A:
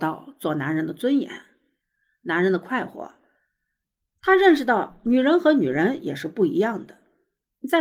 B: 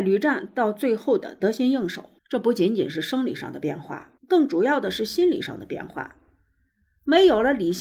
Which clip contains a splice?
B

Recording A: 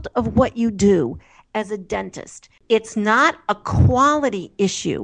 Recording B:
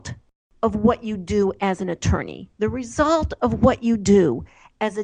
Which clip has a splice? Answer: A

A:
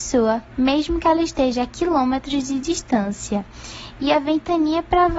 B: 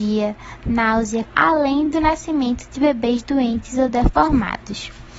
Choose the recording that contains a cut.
B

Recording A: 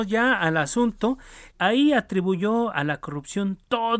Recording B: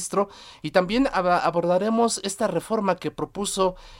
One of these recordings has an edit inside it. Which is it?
A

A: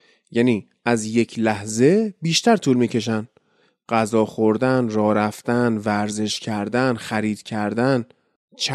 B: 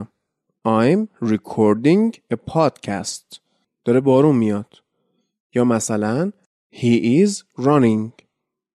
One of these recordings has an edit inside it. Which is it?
B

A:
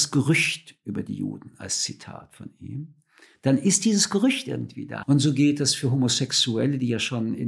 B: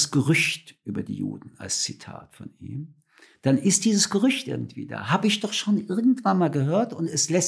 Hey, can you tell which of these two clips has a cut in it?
A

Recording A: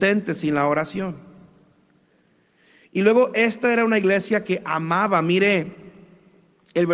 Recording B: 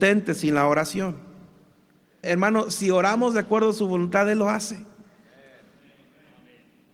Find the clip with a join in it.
B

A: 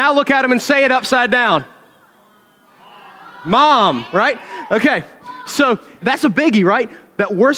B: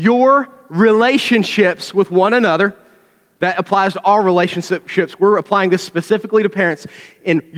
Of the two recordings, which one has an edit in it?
A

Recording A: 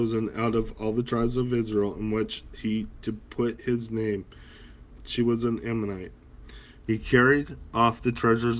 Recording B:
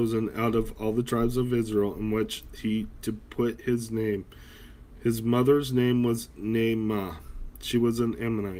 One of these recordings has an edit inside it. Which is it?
A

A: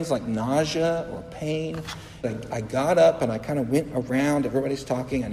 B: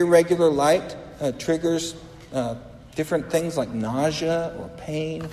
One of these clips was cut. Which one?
A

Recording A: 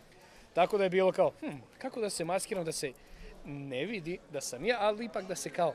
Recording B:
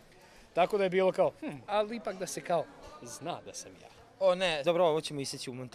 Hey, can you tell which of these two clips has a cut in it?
B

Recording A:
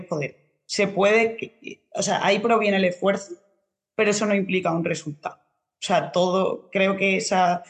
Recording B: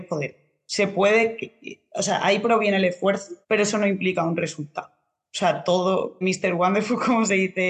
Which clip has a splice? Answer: B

